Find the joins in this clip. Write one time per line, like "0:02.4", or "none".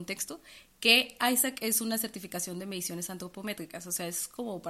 none